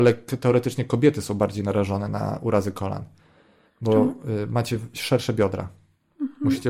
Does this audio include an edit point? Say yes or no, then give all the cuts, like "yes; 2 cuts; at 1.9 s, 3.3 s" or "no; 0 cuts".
no; 0 cuts